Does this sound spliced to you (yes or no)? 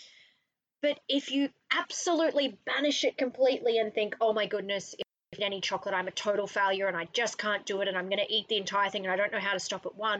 no